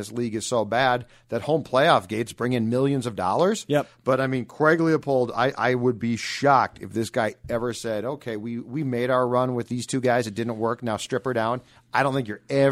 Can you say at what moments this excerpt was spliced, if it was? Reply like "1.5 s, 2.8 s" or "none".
none